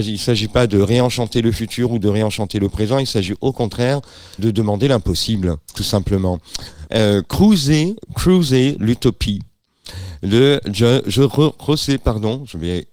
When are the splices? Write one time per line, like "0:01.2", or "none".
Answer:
0:04.4
0:06.9

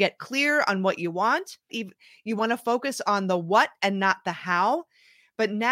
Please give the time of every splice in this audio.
0:01.7

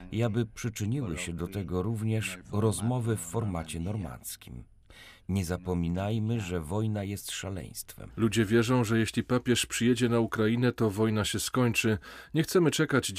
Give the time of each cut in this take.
0:08.1

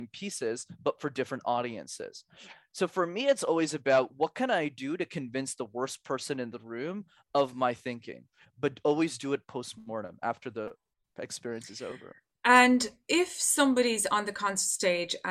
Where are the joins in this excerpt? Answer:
0:08.4

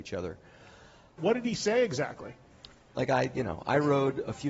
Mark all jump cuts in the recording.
0:01.2
0:02.9

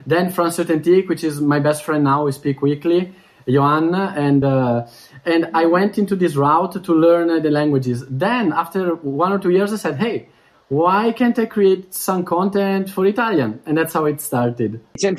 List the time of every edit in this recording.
none

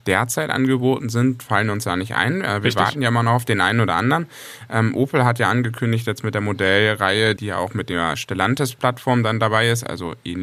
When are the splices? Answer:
0:07.4

